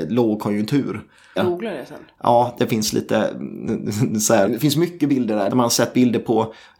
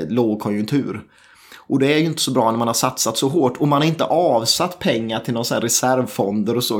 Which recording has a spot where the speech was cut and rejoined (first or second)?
first